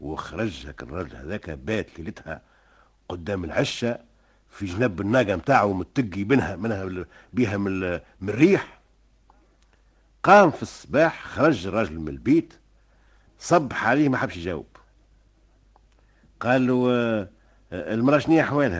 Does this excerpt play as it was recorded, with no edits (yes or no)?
yes